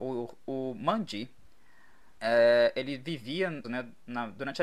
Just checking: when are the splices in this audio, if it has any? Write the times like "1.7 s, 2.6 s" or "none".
2.2 s, 3.6 s